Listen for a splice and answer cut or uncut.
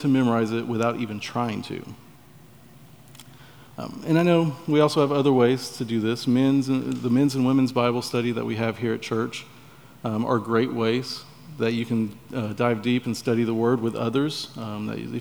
uncut